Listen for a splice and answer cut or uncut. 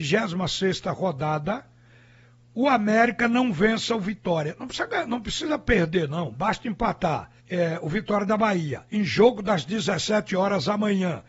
cut